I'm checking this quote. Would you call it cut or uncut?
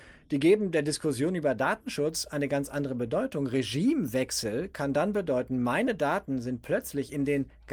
uncut